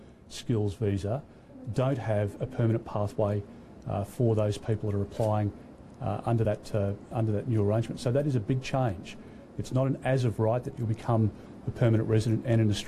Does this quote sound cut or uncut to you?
uncut